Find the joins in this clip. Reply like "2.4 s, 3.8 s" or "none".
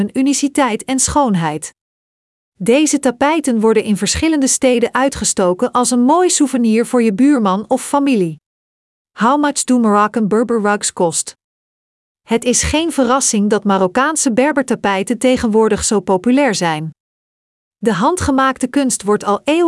9.0 s